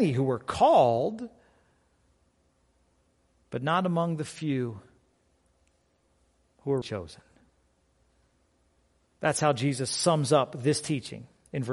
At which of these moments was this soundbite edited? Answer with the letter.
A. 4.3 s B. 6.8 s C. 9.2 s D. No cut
B